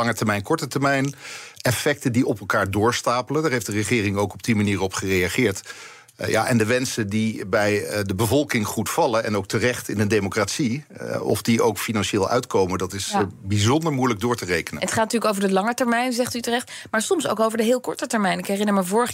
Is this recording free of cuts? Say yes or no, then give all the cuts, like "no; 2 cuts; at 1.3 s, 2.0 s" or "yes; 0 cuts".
yes; 0 cuts